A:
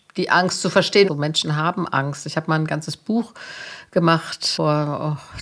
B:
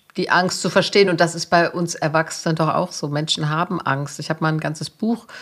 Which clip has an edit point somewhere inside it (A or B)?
A